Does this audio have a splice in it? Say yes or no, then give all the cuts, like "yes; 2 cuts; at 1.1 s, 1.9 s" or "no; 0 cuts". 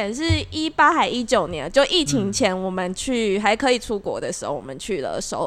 no; 0 cuts